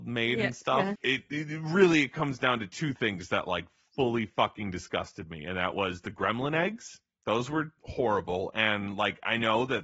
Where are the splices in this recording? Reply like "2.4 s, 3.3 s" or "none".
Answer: 1.0 s